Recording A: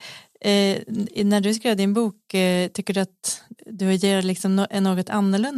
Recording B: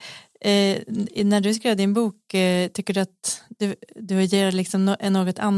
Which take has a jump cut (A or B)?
A